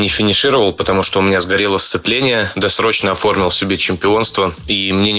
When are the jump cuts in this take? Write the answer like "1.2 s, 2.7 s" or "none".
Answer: 2.5 s